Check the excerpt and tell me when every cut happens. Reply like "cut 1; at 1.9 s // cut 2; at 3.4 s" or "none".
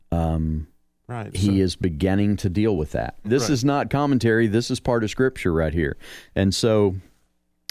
cut 1; at 3.2 s